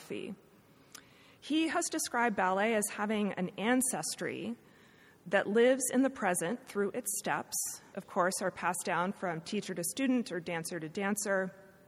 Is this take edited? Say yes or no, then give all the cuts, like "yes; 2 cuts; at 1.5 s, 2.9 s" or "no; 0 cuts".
yes; 1 cut; at 7.9 s